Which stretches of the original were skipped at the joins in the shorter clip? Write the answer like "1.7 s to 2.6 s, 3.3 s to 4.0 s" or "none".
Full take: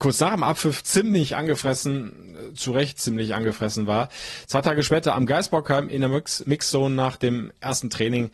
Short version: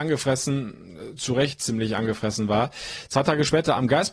none